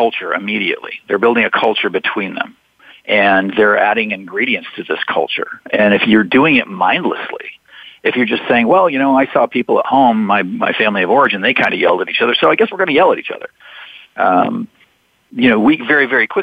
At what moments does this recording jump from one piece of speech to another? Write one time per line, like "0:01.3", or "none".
none